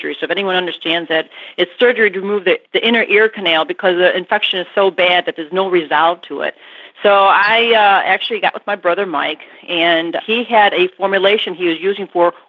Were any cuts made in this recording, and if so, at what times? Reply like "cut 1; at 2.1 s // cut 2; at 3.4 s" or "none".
cut 1; at 2.7 s